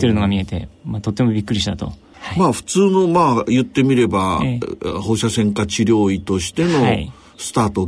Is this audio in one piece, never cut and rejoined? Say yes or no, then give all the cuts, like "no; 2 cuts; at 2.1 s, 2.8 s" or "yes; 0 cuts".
no; 1 cut; at 2.1 s